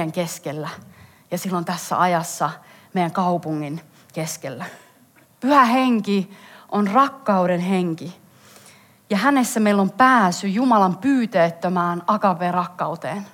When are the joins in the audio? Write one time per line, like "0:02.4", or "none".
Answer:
0:05.2